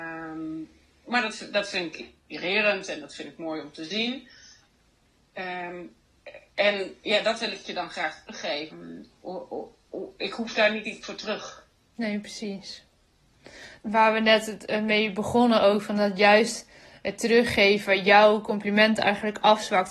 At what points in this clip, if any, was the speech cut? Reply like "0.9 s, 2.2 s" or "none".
8.7 s, 13.8 s